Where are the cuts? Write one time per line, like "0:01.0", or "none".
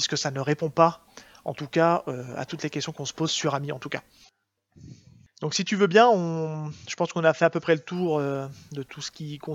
none